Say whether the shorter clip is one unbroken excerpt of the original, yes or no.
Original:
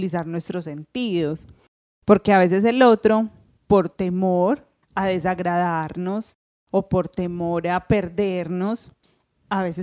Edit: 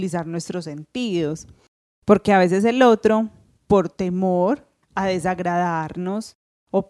yes